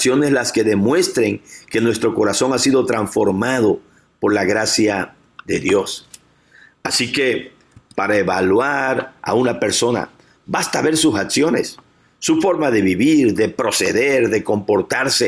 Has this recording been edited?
no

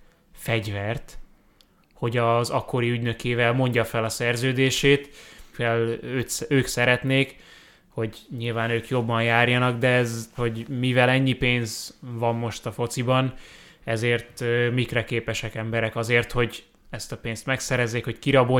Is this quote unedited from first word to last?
no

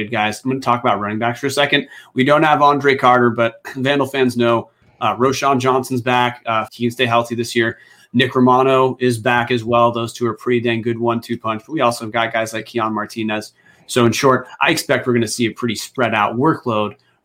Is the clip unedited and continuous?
no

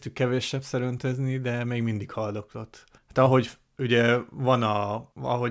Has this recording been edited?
yes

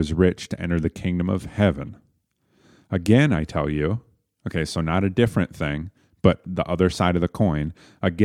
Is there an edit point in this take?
no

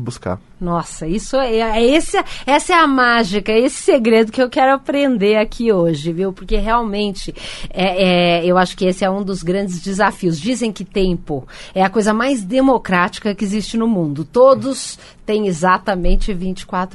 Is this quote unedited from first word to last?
yes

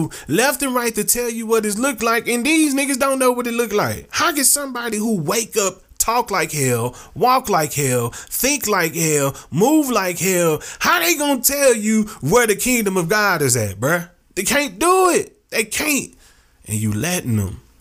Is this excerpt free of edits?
yes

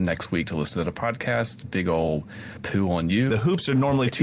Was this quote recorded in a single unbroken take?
no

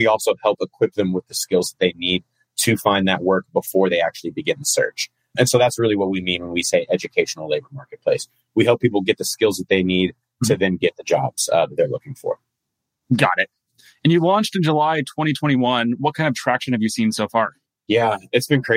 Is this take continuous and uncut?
yes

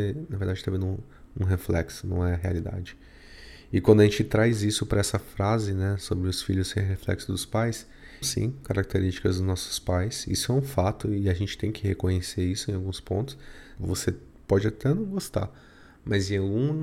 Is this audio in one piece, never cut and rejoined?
no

